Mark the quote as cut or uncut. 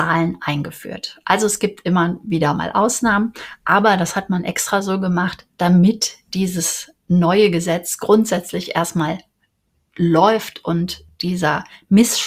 uncut